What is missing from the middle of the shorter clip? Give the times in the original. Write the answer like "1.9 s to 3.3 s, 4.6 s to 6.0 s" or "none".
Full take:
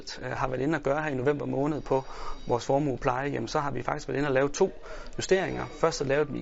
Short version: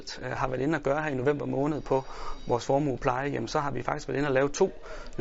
none